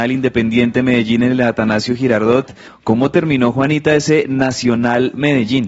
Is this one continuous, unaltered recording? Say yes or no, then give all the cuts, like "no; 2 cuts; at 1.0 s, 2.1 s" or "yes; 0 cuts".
no; 1 cut; at 2.7 s